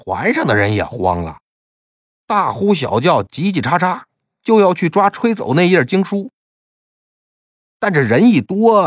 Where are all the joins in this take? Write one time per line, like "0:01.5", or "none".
none